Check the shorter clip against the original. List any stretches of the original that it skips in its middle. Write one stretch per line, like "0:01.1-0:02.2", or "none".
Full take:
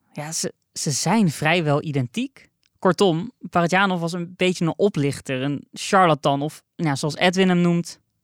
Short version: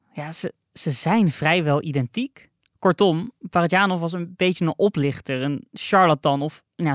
none